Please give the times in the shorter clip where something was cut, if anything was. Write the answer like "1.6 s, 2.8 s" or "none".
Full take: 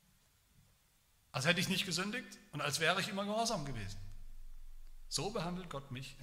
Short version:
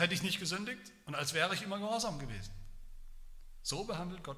none